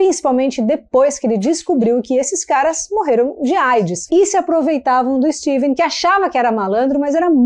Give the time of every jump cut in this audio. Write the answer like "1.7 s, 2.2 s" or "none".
4.1 s, 5.8 s